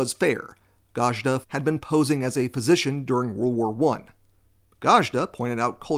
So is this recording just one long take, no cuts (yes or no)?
no